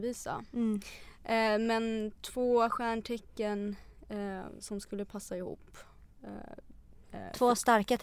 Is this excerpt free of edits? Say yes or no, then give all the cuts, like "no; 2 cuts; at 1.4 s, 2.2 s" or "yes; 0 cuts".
no; 1 cut; at 7.0 s